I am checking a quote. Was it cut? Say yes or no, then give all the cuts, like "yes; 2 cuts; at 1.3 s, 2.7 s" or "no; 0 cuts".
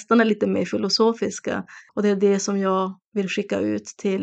yes; 1 cut; at 1.9 s